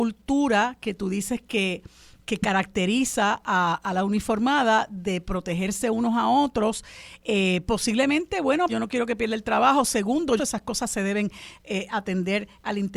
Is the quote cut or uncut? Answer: cut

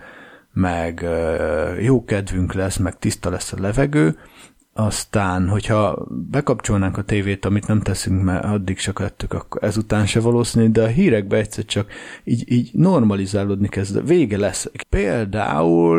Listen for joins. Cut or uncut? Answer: cut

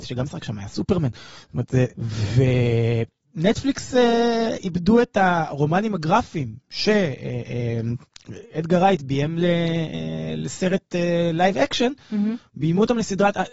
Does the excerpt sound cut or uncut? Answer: cut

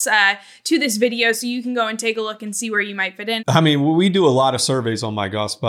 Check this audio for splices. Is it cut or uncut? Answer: cut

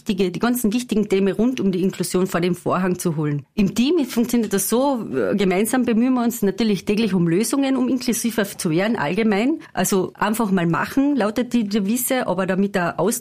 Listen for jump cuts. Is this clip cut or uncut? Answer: uncut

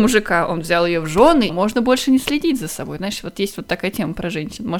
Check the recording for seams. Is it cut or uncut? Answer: cut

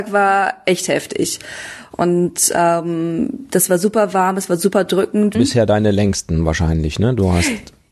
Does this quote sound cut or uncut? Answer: cut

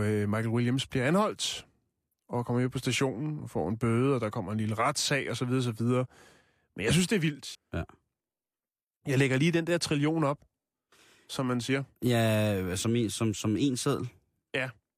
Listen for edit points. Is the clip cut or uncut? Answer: cut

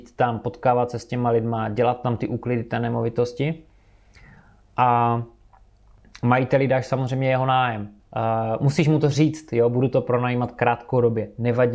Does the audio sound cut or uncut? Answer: cut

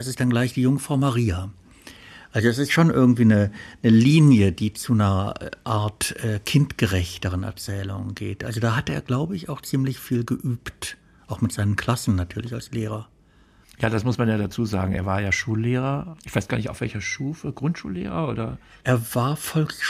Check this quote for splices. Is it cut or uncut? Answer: uncut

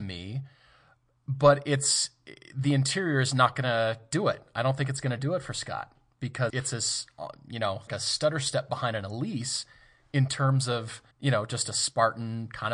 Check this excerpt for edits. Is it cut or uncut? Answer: cut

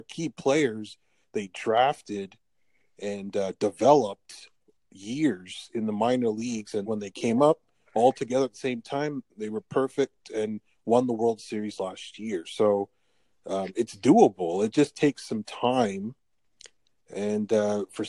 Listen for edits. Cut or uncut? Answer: cut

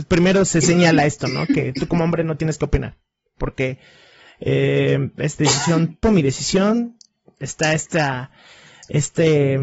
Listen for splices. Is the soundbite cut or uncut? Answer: cut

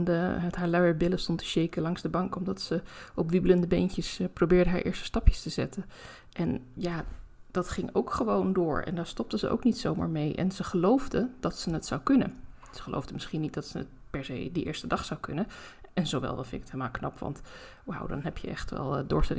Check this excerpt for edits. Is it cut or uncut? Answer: uncut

